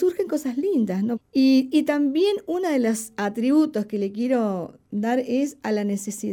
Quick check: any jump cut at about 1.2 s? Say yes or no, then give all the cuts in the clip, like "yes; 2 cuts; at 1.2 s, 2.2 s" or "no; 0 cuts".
yes; 1 cut; at 1.2 s